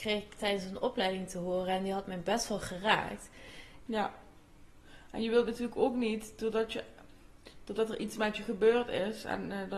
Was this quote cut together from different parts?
yes; 1 cut; at 3.9 s

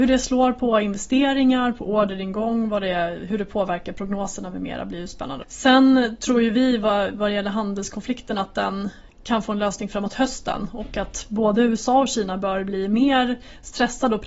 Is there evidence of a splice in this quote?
yes; 1 cut; at 5.4 s

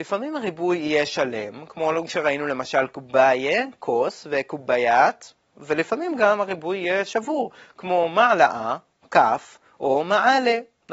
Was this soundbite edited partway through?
no; 0 cuts

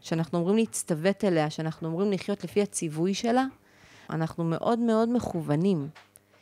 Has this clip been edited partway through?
yes; 1 cut; at 4.1 s

